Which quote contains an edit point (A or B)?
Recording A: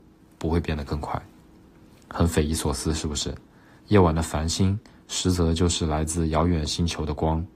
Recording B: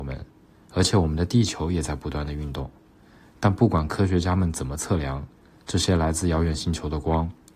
A